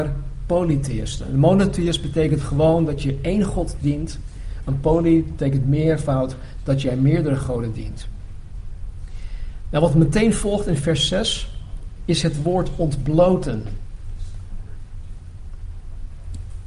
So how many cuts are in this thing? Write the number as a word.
zero